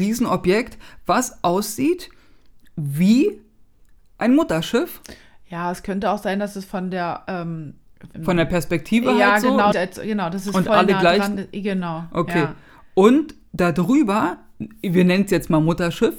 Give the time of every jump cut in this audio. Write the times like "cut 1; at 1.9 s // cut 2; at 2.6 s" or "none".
cut 1; at 8.1 s // cut 2; at 9.7 s